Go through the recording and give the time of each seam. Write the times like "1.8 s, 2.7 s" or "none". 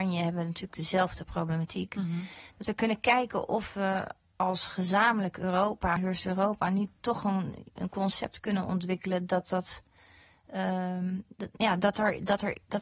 none